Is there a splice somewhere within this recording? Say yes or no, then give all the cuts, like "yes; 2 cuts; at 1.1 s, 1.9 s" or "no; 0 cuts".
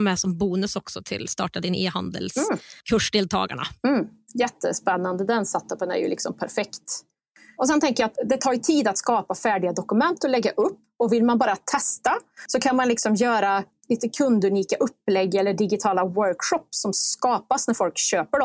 no; 0 cuts